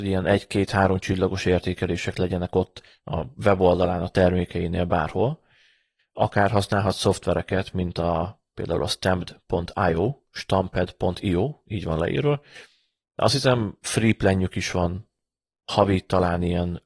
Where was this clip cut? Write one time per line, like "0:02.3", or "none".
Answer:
0:06.0